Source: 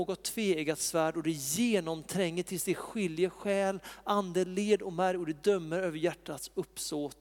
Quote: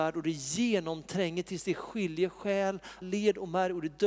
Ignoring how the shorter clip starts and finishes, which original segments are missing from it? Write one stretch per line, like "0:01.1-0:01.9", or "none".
0:04.0-0:04.5